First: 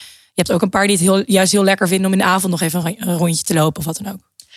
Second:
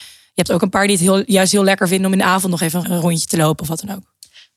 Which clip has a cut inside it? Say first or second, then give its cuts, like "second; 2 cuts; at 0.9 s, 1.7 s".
second; 1 cut; at 2.8 s